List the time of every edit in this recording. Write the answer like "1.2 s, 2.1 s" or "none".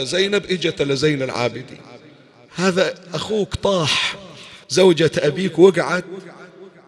4.6 s